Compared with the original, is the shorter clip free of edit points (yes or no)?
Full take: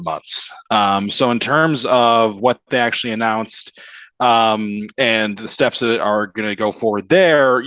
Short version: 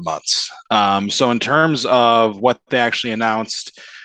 yes